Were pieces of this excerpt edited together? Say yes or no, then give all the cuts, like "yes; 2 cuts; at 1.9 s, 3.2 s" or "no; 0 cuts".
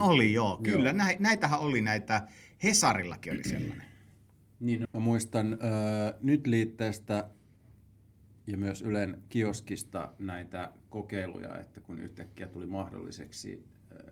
yes; 1 cut; at 4.8 s